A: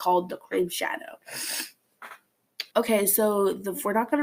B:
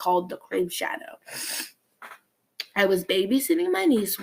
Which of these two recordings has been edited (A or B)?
A